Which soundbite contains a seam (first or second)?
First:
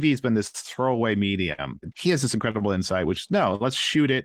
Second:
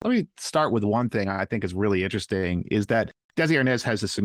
first